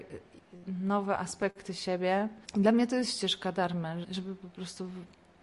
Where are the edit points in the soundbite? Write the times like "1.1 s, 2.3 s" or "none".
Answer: 2.4 s, 4.0 s